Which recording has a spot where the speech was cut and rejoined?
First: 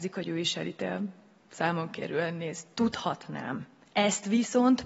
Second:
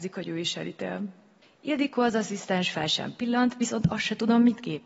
second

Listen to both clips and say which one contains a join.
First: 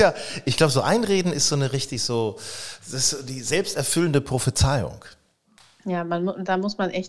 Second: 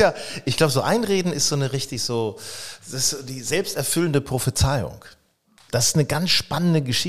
second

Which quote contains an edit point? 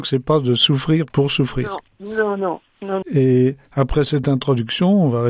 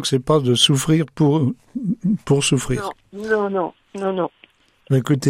first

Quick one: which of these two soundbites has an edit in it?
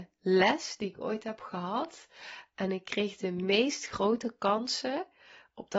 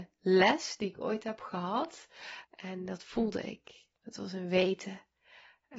second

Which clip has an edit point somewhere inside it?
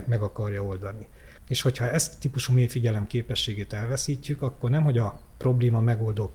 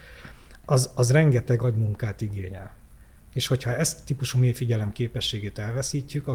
first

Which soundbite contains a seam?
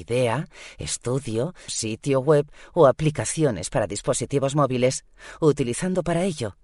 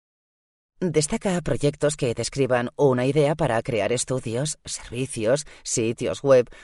first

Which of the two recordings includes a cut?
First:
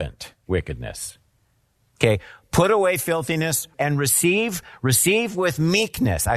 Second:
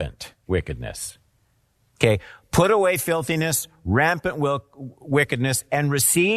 first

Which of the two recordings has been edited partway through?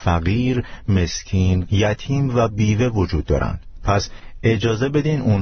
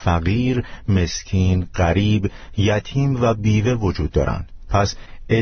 first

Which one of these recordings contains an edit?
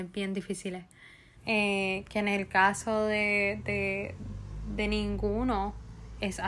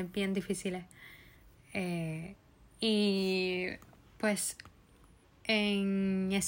first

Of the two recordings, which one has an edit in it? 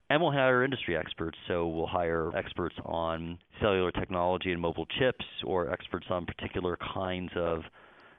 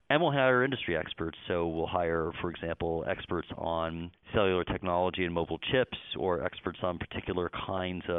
first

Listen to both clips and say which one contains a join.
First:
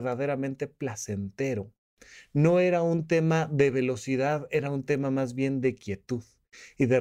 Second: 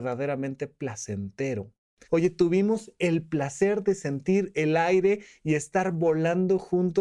second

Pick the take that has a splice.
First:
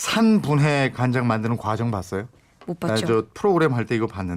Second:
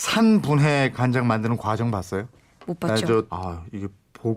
second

